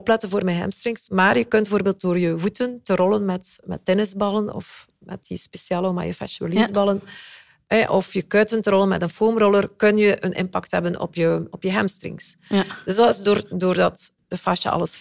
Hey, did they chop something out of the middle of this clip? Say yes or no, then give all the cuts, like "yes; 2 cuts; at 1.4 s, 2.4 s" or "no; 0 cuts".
no; 0 cuts